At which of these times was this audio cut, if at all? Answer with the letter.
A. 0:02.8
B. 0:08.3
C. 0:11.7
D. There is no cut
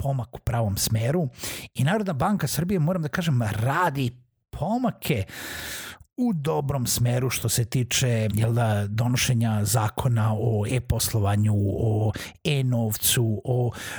B